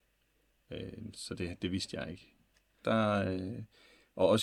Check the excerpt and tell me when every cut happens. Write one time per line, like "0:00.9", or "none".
0:01.1
0:02.8